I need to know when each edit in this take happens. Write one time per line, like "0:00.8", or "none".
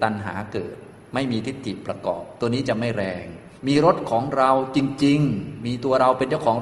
0:03.6